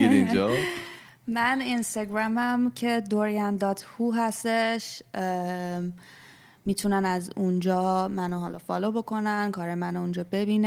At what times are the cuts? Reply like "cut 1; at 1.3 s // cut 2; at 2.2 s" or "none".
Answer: none